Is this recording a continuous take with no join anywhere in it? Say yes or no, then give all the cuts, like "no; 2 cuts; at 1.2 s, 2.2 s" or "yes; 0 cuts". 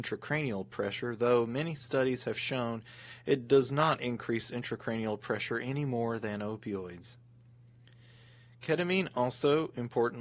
yes; 0 cuts